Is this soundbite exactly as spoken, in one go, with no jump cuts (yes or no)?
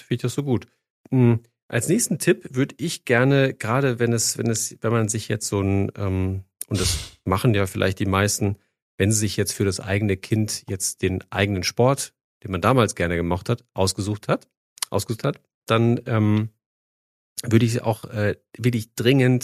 yes